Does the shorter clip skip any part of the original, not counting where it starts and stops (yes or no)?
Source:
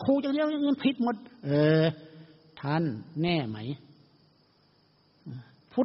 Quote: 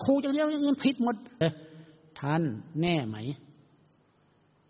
yes